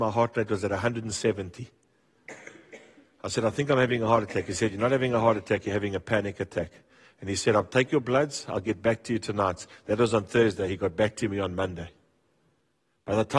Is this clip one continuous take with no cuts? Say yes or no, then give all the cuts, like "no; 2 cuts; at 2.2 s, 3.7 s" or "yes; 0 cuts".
yes; 0 cuts